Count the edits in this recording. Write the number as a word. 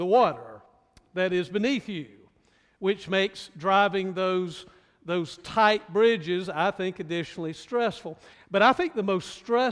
one